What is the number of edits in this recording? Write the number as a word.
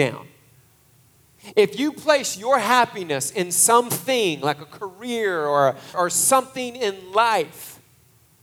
one